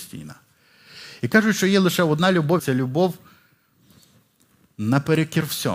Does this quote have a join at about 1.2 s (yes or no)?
no